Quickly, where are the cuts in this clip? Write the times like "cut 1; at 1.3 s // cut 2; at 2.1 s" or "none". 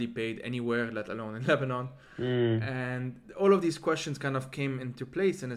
none